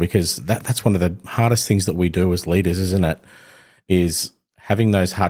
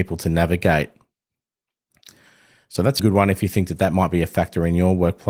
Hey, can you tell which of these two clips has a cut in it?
second; 1 cut; at 3.0 s

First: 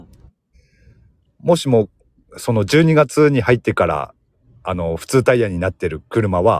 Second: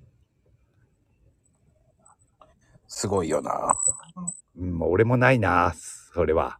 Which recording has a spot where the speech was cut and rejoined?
second; 1 cut; at 4.4 s

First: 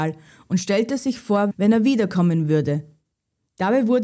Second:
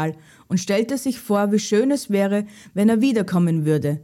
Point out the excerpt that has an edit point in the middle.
first; 1 cut; at 1.5 s

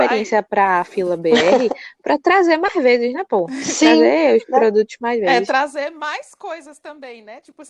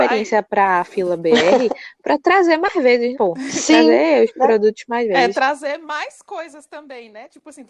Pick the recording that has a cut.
second; 1 cut; at 3.1 s

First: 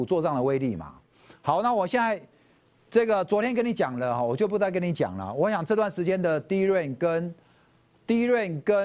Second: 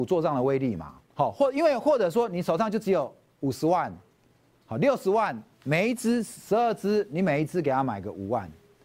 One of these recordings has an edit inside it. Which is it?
second; 1 cut; at 1.1 s

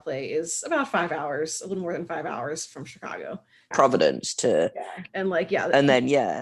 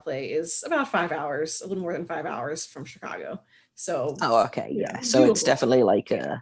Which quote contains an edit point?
first; 2 cuts; at 3.7 s, 5.1 s

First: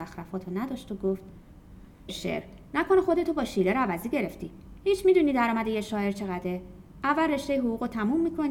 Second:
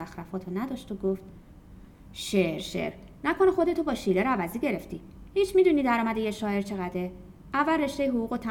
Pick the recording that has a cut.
first; 1 cut; at 2.1 s

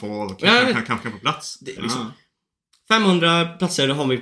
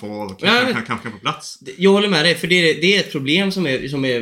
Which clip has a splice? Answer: first; 1 cut; at 1.8 s

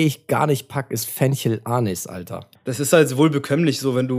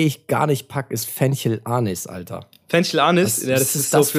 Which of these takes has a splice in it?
first; 1 cut; at 2.6 s

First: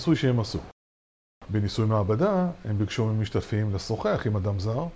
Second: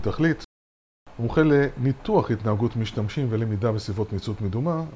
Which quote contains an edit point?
first; 1 cut; at 1.4 s

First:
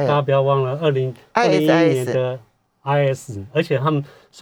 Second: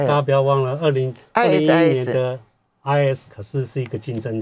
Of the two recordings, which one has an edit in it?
second; 1 cut; at 3.3 s

